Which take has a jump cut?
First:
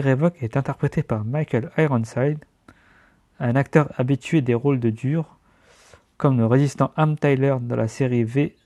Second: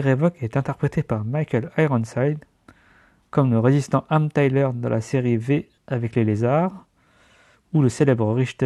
second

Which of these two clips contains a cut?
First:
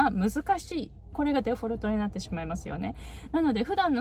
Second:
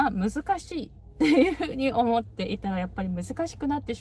first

